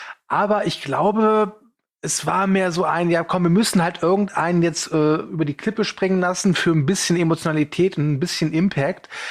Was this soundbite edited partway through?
no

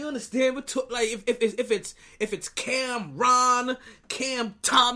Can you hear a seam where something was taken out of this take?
no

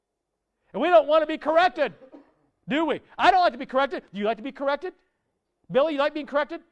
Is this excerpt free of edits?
yes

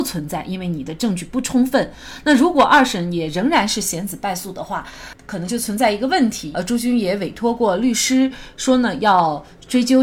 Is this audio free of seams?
no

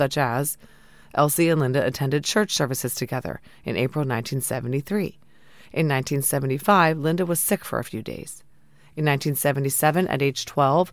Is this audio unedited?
yes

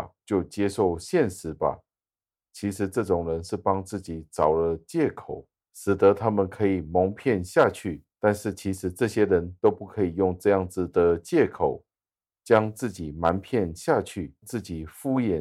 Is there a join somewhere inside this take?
yes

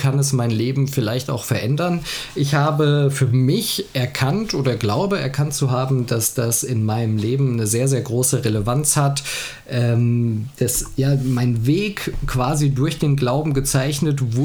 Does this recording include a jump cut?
yes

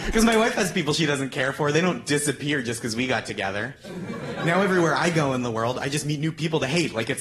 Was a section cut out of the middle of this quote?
no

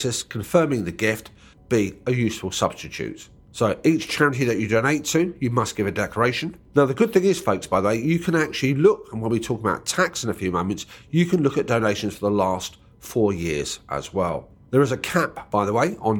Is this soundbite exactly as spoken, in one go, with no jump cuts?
yes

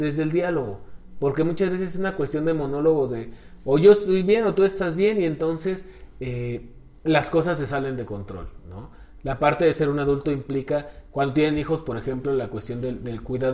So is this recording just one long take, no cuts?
yes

